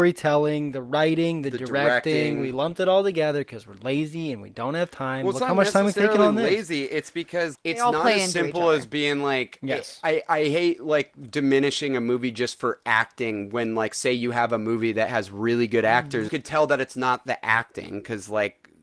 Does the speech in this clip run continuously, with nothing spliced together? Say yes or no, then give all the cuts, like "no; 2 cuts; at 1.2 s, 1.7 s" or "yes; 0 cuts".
no; 2 cuts; at 7.5 s, 16.3 s